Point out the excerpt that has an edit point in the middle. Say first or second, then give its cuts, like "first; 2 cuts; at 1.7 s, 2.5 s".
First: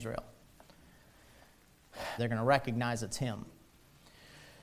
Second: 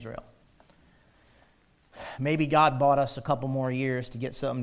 first; 1 cut; at 2.2 s